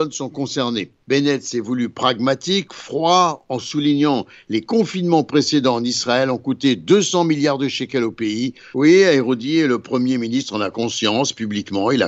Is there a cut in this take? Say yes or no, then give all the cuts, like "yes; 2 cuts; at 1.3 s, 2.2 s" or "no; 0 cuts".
yes; 2 cuts; at 1.0 s, 8.7 s